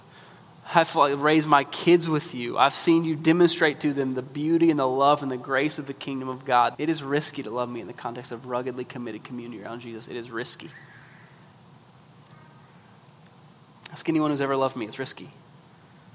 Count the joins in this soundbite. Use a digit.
1